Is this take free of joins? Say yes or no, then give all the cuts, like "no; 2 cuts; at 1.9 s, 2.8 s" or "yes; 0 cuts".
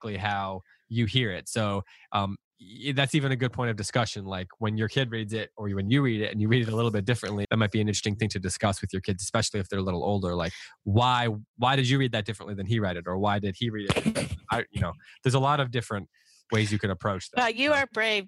no; 1 cut; at 7.4 s